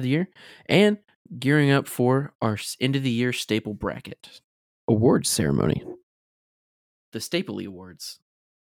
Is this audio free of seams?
yes; 0 cuts

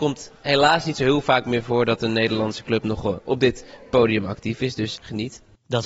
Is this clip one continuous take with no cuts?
no; 1 cut; at 5.0 s

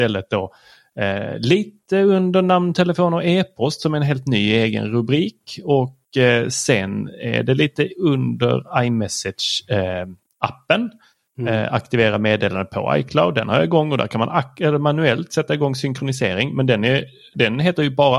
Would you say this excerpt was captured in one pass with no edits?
yes; 0 cuts

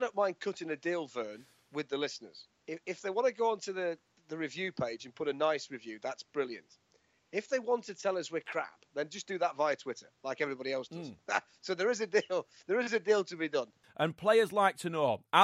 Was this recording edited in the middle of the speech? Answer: yes; 1 cut; at 13.8 s

